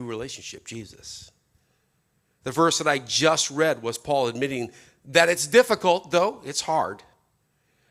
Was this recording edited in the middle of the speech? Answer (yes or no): no